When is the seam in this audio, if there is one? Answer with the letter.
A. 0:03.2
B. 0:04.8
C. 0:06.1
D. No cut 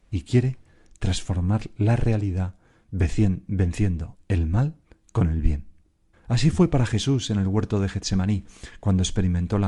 C